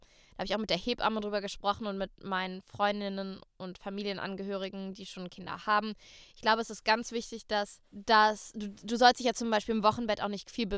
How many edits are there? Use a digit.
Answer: 1